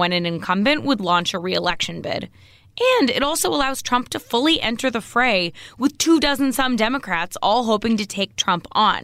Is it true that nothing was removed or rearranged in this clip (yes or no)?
yes